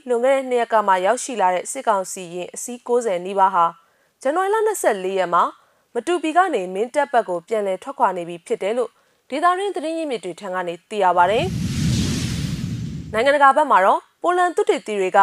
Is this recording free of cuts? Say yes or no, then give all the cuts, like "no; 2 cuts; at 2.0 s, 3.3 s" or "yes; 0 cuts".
yes; 0 cuts